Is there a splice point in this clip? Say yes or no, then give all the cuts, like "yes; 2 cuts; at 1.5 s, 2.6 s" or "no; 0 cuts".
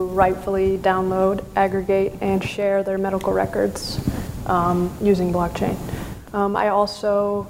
no; 0 cuts